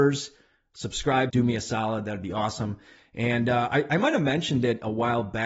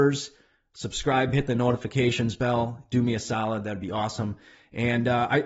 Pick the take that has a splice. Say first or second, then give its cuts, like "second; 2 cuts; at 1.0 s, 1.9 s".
first; 1 cut; at 1.3 s